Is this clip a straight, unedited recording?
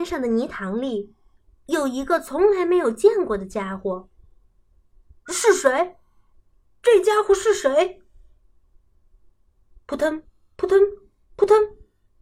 yes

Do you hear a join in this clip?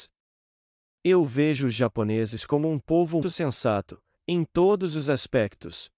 yes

